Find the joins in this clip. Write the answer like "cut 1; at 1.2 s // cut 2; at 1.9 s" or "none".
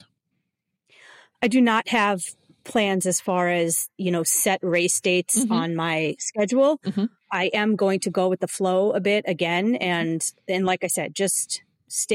none